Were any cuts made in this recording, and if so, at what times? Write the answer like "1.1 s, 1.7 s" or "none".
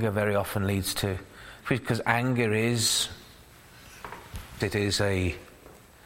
1.6 s, 4.6 s

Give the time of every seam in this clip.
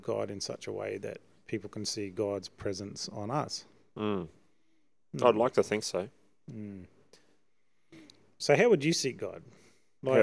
none

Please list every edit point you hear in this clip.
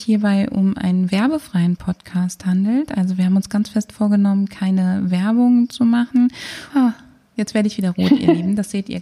6.7 s

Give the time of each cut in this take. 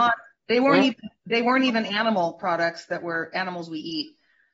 none

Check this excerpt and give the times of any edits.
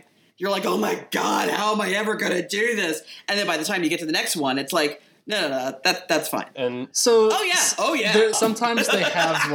6.5 s, 8.3 s

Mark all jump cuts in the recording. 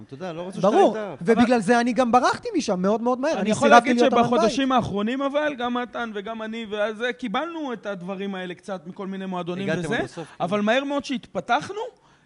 none

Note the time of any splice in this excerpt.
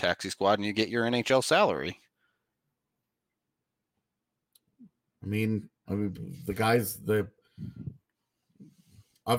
5.9 s

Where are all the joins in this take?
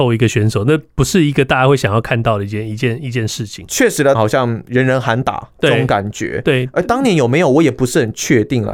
4.1 s

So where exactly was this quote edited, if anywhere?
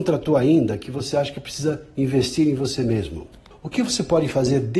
3.5 s

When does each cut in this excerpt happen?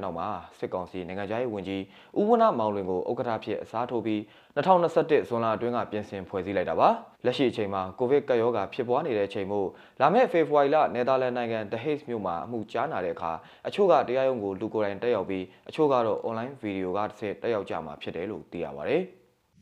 7.1 s

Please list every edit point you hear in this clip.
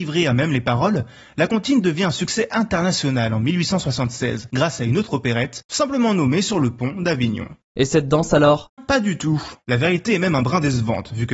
8.8 s

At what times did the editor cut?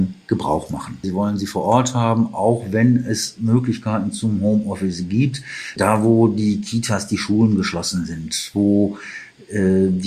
1.0 s, 5.8 s

